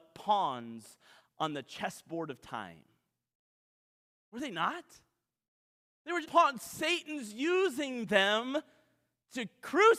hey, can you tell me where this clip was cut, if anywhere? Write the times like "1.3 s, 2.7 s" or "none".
6.2 s